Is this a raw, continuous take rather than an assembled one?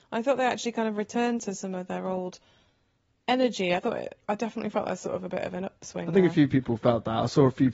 yes; 0 cuts

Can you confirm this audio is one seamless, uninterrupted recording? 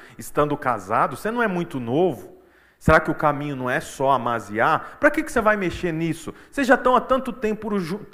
yes; 0 cuts

